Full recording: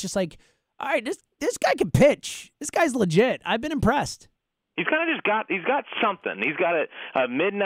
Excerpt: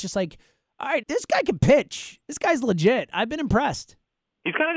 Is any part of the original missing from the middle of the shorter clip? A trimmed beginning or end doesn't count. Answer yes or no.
yes